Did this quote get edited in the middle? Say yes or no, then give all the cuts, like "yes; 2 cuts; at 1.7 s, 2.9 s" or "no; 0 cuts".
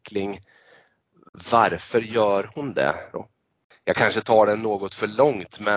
yes; 1 cut; at 3.1 s